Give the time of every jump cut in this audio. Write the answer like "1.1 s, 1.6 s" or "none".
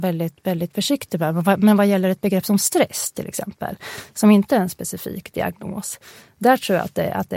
none